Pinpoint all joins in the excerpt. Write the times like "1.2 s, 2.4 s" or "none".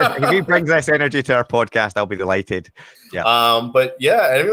3.0 s